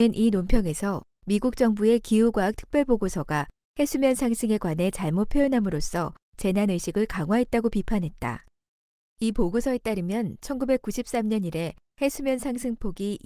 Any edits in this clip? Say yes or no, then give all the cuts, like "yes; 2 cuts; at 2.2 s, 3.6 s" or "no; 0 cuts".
no; 0 cuts